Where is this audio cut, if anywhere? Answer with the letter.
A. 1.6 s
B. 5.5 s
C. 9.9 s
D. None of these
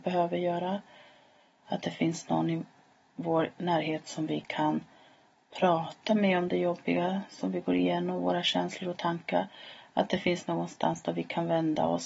A